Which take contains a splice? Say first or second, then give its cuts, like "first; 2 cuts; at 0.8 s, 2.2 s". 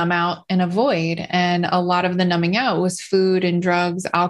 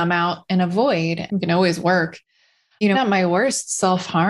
second; 2 cuts; at 1.3 s, 2.9 s